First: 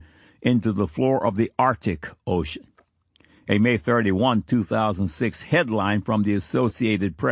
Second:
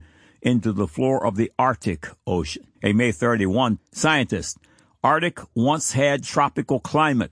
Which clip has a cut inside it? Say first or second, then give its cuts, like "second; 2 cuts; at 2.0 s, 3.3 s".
second; 2 cuts; at 2.7 s, 3.8 s